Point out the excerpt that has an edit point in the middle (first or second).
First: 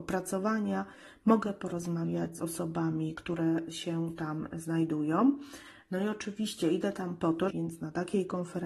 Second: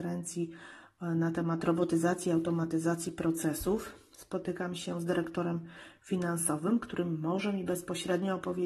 first